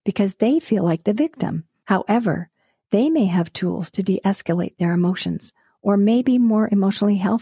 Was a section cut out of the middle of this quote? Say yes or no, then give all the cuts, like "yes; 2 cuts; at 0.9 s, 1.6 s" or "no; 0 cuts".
yes; 1 cut; at 1.8 s